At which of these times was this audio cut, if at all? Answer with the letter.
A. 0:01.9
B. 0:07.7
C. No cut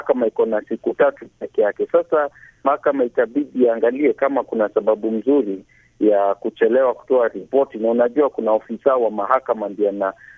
C